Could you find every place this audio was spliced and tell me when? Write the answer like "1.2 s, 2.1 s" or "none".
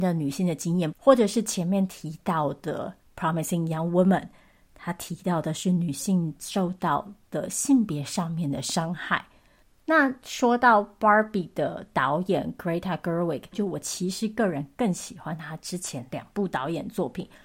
0.9 s, 13.5 s